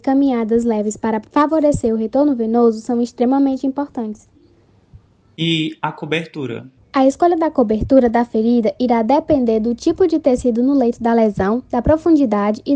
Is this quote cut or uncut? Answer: cut